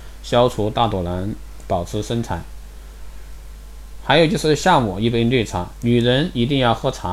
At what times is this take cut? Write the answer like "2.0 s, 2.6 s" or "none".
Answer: none